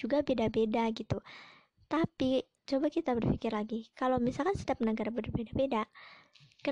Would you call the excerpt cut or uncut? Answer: uncut